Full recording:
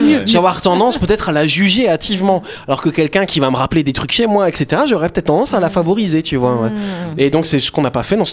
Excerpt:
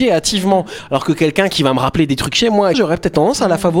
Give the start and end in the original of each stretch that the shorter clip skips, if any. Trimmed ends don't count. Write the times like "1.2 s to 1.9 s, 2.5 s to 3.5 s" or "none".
4.5 s to 4.9 s